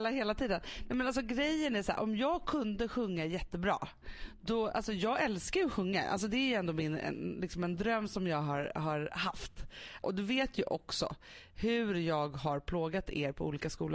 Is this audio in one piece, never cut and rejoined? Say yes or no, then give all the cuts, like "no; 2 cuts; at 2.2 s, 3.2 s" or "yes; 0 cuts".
no; 1 cut; at 10.0 s